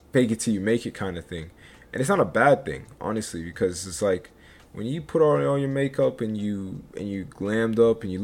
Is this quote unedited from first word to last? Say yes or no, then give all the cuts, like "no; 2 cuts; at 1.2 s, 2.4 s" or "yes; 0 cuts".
yes; 0 cuts